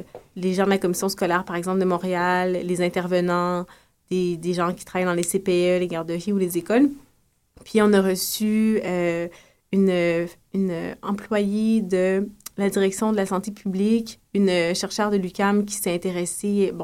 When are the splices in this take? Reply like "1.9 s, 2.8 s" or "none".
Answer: none